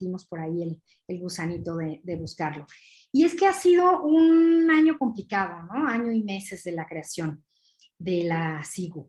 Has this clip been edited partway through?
no; 0 cuts

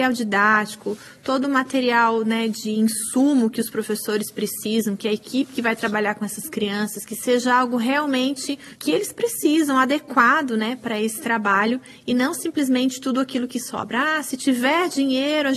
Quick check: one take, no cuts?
yes; 0 cuts

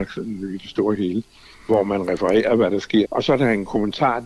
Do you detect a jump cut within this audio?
yes; 1 cut; at 3.0 s

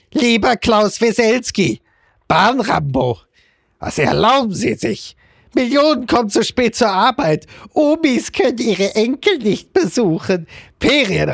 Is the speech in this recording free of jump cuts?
yes; 0 cuts

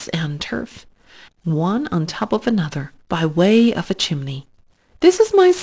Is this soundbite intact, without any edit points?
no; 2 cuts; at 1.3 s, 3.0 s

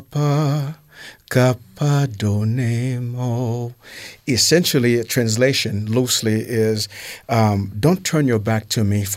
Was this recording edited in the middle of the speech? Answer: no; 0 cuts

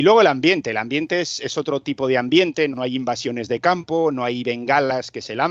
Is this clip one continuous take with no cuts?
no; 1 cut; at 2.7 s

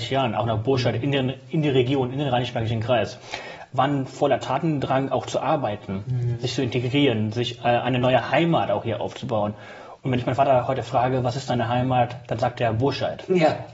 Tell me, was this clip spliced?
no; 0 cuts

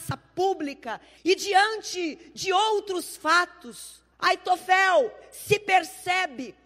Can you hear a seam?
yes; 2 cuts; at 1.2 s, 4.1 s

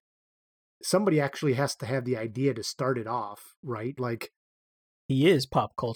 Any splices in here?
yes; 1 cut; at 4.0 s

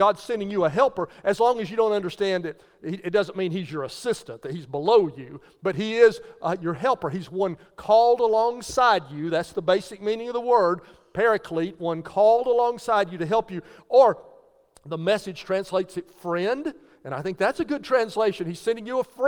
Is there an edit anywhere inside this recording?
no; 0 cuts

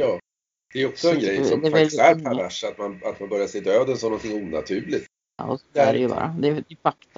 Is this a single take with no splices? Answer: no; 1 cut; at 5.4 s

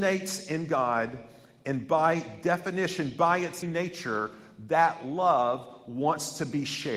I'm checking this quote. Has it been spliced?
yes; 1 cut; at 3.6 s

